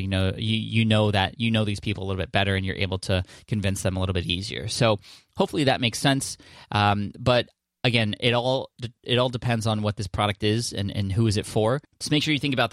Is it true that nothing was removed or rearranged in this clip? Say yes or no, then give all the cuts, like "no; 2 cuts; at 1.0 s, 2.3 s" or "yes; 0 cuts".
yes; 0 cuts